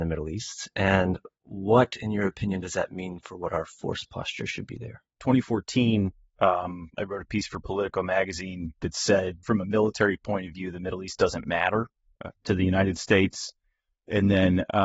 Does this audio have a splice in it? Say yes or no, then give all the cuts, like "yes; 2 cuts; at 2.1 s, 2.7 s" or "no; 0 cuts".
yes; 2 cuts; at 5.2 s, 9.4 s